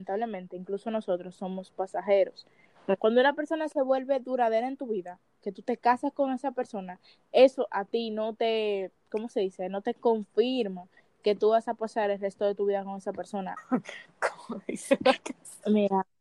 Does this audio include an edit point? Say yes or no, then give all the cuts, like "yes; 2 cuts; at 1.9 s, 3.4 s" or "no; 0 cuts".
yes; 1 cut; at 13.6 s